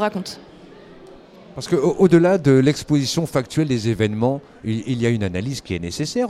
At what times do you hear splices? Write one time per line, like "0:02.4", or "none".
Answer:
none